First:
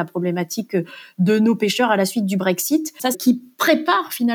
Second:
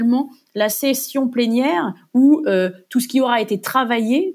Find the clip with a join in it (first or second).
first